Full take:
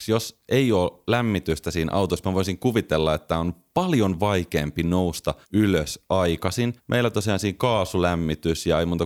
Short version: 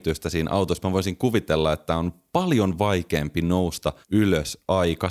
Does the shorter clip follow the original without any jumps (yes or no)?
yes